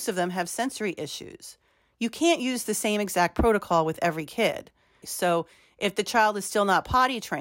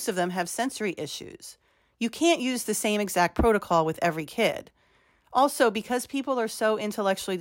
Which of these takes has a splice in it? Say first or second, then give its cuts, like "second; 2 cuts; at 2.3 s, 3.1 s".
first; 1 cut; at 5.0 s